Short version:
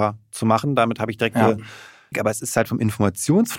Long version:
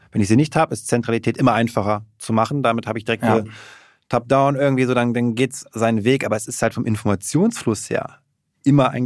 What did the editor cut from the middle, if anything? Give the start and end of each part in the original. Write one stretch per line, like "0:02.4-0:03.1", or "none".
0:04.0-0:06.2